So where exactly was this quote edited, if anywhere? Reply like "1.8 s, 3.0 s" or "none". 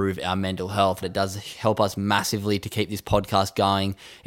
1.0 s